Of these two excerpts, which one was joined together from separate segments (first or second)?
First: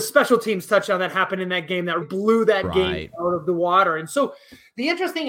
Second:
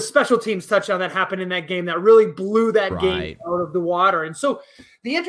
first